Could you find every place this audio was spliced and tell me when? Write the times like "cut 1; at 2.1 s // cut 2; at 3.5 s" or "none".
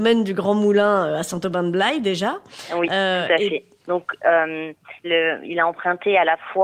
cut 1; at 3.8 s // cut 2; at 5.0 s